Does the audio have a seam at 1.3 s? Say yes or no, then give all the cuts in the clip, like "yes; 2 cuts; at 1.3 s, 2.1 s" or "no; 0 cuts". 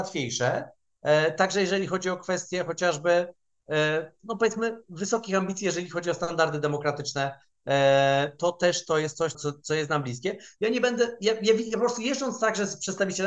no; 1 cut; at 9.3 s